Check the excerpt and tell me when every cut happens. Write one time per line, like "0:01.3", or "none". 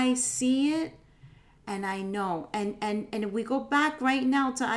none